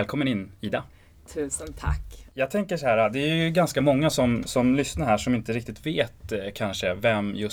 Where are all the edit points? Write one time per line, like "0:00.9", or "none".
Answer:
none